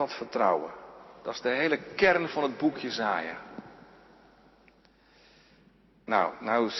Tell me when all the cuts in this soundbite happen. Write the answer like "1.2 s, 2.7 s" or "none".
none